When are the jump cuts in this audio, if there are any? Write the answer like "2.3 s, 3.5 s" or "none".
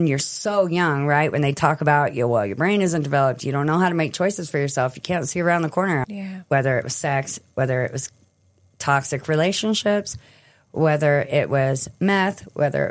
6.0 s